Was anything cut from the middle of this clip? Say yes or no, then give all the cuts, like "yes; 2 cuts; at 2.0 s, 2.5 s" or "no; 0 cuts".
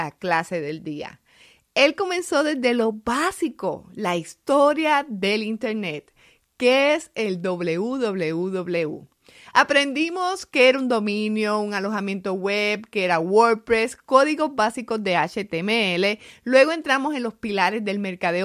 no; 0 cuts